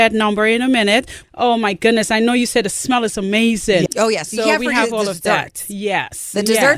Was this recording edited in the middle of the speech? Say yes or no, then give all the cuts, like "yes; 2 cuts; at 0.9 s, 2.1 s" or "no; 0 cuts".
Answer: yes; 2 cuts; at 1.2 s, 3.9 s